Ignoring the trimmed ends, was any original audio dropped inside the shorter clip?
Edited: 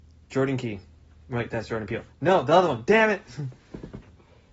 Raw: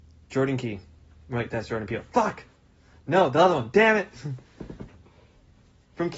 yes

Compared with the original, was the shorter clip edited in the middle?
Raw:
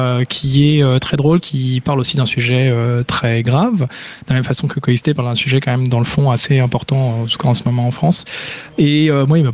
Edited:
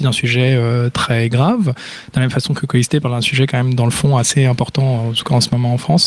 no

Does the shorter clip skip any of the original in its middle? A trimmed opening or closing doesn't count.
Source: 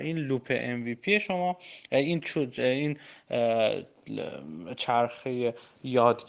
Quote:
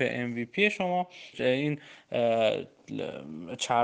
yes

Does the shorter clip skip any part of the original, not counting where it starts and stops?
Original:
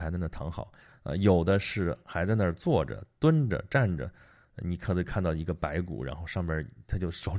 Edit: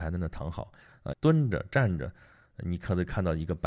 yes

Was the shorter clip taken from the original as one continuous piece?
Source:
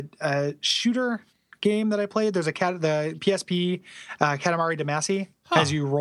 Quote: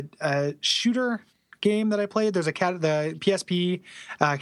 yes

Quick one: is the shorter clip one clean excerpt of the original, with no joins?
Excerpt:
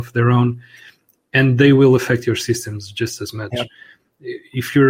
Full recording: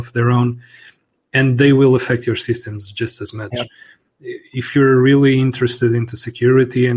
yes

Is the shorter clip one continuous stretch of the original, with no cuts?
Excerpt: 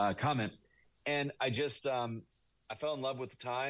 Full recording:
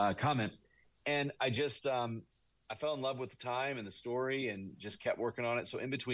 yes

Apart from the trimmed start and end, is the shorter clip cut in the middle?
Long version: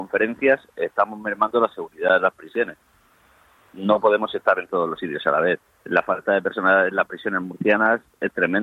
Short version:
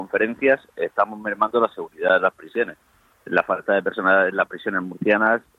yes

